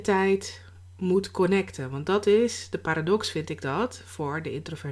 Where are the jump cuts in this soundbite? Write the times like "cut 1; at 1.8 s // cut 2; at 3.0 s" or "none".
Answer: none